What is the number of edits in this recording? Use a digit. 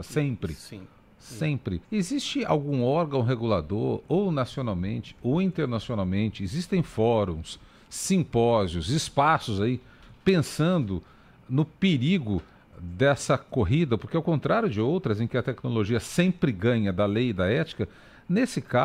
1